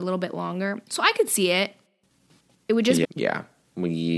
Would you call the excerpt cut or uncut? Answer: cut